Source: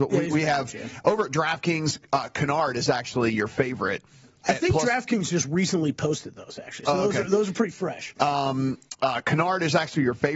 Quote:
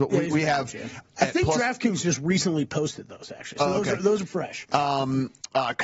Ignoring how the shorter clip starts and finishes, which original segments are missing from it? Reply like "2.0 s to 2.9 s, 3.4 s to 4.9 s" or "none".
1.0 s to 4.3 s, 7.5 s to 7.7 s